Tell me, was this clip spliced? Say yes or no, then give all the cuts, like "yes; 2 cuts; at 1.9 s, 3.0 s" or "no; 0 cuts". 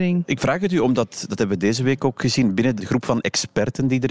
yes; 1 cut; at 2.8 s